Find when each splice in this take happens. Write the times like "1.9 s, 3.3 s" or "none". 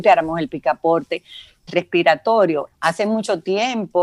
1.7 s, 2.7 s